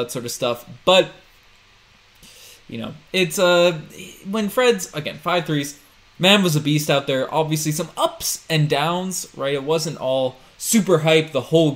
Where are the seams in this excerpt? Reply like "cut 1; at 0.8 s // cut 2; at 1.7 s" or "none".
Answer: cut 1; at 6.2 s